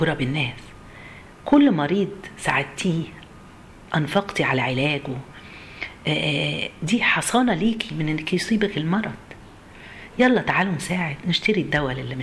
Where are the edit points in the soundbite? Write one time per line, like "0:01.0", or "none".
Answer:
0:03.9